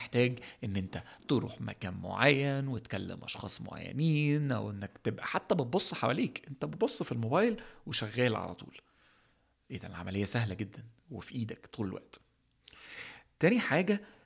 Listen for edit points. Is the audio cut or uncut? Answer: uncut